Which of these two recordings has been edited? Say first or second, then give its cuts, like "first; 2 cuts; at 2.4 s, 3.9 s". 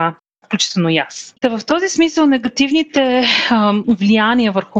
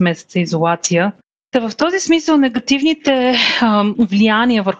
first; 1 cut; at 1.3 s